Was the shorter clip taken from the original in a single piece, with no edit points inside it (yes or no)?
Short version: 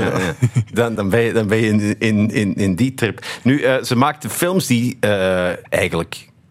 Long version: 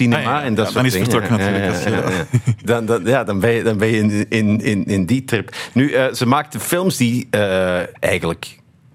no